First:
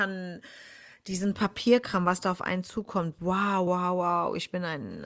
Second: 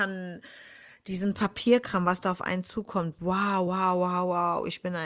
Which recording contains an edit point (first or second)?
first